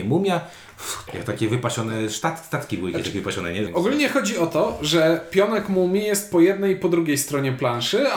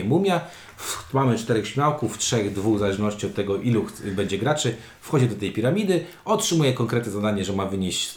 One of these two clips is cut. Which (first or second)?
first